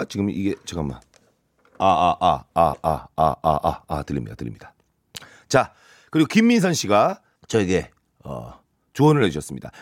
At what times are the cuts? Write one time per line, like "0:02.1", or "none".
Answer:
0:07.4